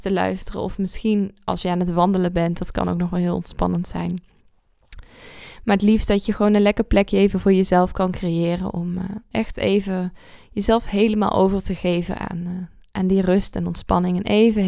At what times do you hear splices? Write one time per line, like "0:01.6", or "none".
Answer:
none